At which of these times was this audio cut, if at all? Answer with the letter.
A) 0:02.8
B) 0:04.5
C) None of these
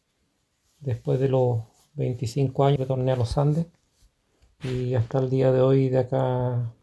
A